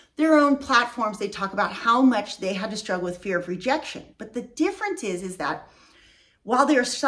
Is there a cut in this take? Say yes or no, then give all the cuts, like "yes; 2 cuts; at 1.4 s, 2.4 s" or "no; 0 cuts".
no; 0 cuts